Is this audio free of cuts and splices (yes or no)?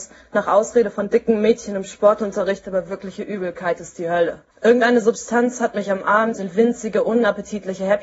no